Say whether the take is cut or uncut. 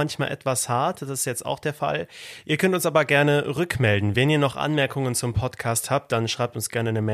uncut